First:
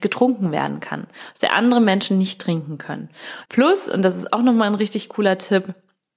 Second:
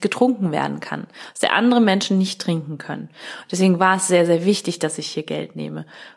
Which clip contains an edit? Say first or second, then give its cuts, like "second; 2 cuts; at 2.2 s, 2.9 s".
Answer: first; 1 cut; at 3.5 s